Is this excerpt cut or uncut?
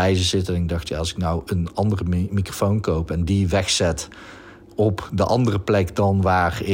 uncut